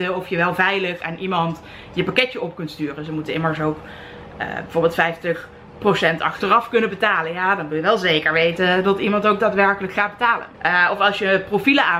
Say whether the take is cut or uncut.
cut